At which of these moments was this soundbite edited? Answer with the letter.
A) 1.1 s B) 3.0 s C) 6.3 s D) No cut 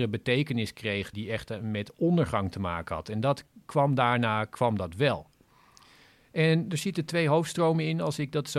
A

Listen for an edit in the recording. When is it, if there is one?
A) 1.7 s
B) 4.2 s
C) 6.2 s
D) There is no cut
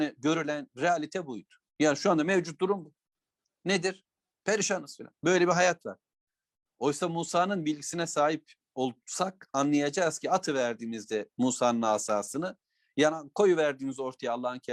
B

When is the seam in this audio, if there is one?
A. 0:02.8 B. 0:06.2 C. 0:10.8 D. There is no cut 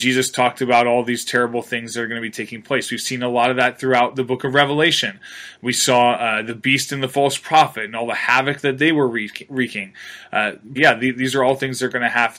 C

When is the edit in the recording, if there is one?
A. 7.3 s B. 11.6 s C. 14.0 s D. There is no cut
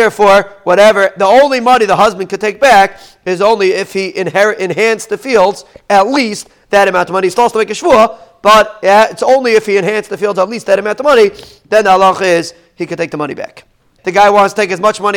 C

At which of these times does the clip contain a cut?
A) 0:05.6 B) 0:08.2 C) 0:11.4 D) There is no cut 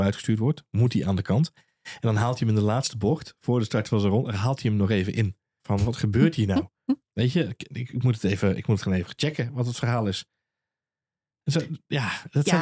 A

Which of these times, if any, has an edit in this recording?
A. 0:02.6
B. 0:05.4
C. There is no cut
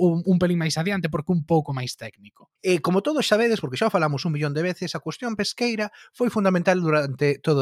A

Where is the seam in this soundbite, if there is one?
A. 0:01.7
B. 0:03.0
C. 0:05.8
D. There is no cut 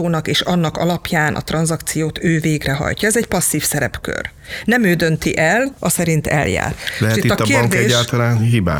C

